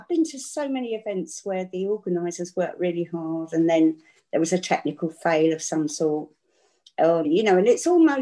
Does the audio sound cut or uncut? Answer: cut